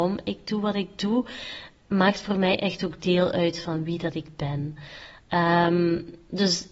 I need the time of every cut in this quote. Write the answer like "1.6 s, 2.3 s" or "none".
none